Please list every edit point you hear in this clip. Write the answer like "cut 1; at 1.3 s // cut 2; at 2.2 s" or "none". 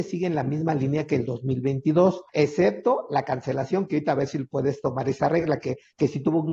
cut 1; at 2.3 s